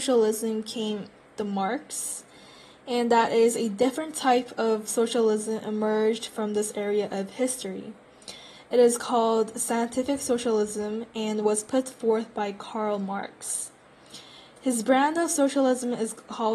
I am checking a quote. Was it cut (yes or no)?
no